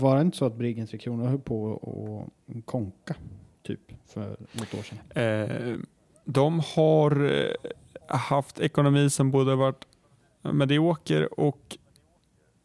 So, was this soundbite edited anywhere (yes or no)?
no